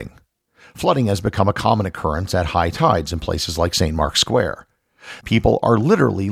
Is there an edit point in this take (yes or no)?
yes